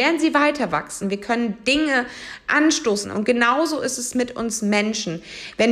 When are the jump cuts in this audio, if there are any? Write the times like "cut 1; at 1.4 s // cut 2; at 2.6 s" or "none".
cut 1; at 1.0 s // cut 2; at 3.0 s